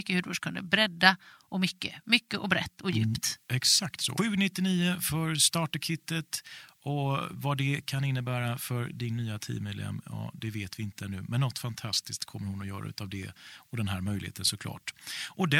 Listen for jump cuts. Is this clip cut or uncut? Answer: cut